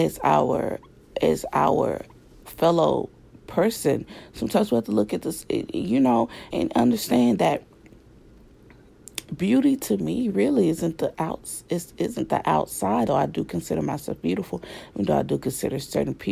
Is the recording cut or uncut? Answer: cut